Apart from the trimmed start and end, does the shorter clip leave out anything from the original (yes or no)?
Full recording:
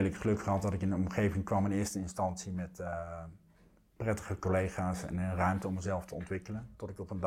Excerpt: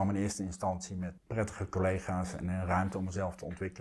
yes